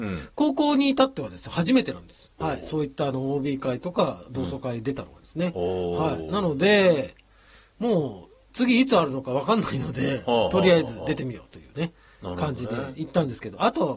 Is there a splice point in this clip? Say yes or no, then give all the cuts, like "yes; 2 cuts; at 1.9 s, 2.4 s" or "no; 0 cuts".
yes; 1 cut; at 2.4 s